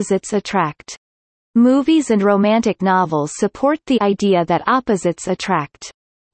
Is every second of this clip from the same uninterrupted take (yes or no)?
yes